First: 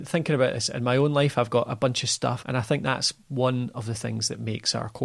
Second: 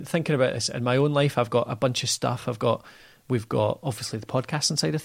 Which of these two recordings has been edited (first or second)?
first